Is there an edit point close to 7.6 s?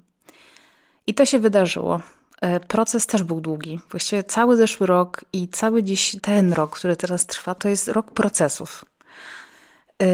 yes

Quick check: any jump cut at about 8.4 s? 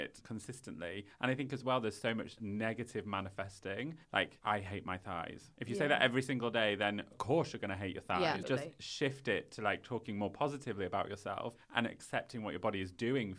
yes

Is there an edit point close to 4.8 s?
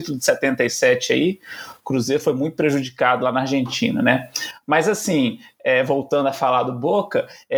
no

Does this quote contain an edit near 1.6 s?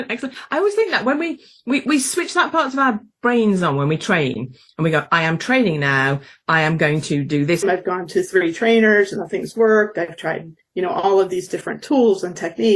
no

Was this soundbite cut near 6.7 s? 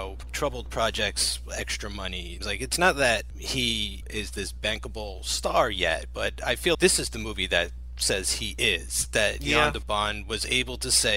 yes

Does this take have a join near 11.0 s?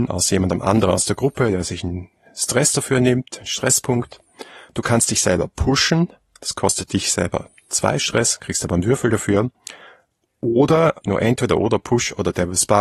yes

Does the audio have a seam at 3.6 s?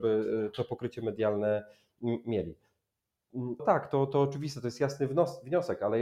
yes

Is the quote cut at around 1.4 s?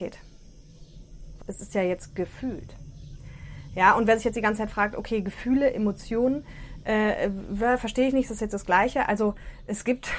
yes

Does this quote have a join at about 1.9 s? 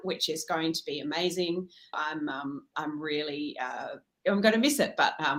yes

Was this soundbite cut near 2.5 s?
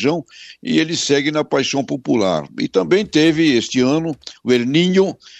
no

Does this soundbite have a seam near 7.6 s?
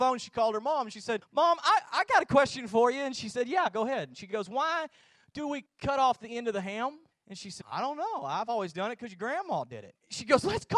yes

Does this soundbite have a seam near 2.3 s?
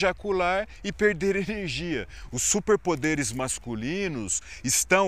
yes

